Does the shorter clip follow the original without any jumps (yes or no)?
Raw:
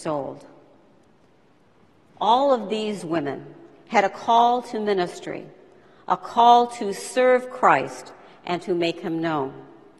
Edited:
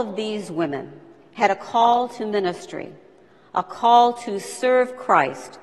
yes